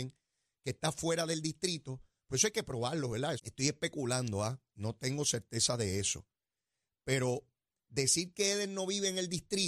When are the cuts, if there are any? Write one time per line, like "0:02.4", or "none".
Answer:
0:03.4